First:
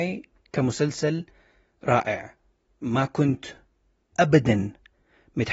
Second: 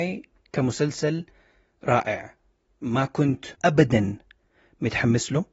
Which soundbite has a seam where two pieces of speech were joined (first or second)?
second